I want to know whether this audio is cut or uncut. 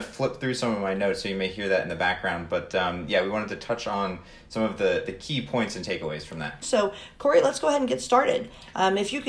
cut